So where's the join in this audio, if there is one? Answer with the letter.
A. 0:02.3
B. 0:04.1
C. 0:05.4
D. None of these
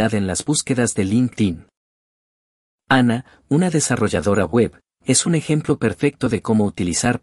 D